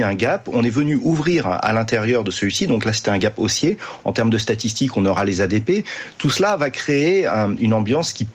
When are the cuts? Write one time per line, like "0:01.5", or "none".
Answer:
0:04.0